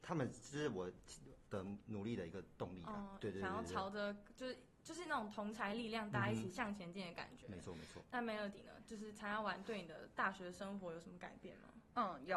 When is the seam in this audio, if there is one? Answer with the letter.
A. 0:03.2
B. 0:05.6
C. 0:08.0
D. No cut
A